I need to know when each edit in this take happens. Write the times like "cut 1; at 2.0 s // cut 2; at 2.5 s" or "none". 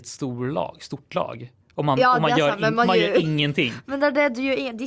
cut 1; at 1.6 s